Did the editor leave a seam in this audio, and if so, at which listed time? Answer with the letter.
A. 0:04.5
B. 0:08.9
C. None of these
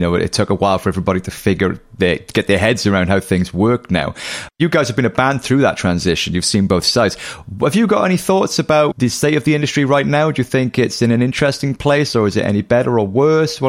B